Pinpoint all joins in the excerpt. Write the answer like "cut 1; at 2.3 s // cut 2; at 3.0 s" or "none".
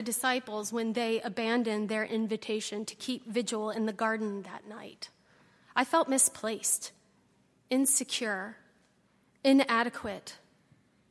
none